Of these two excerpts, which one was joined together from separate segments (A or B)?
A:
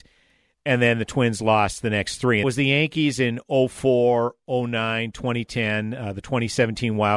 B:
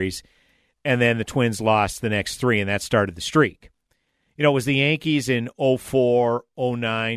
A